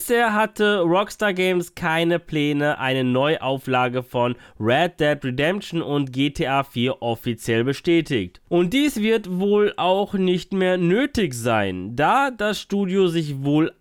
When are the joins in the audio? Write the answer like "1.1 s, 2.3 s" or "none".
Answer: none